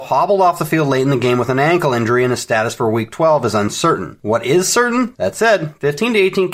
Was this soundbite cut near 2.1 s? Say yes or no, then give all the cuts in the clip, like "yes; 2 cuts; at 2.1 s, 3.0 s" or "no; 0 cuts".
no; 1 cut; at 5.1 s